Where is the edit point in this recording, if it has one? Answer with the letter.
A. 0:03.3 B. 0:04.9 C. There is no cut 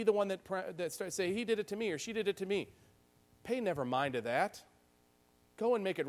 C